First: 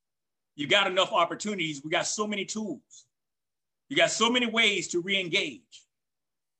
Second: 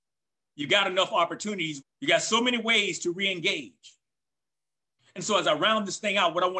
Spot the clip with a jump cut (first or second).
second